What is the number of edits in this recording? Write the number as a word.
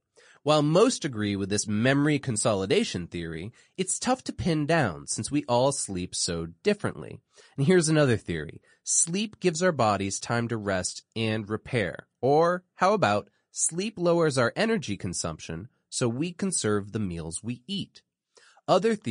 zero